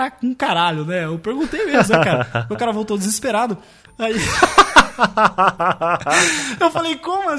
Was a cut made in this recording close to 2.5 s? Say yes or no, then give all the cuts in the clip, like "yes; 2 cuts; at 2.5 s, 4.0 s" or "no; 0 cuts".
no; 1 cut; at 3.8 s